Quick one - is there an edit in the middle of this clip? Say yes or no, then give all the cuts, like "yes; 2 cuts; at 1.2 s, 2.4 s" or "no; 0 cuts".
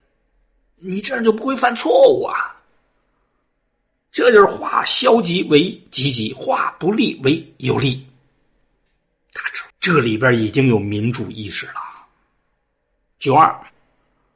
yes; 1 cut; at 9.7 s